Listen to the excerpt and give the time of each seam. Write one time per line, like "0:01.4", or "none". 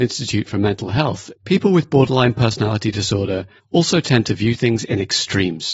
0:01.4